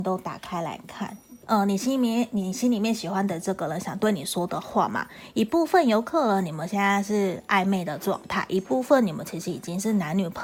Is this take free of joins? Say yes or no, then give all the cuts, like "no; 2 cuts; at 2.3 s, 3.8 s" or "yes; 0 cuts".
no; 1 cut; at 1.4 s